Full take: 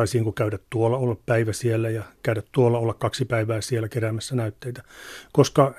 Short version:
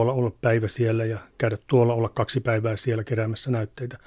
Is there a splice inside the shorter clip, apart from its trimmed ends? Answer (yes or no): no